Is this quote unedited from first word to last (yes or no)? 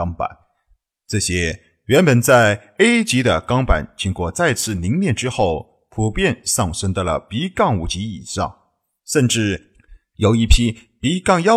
yes